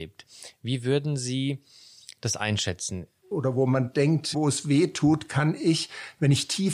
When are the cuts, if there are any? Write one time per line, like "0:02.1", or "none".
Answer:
0:03.3
0:04.3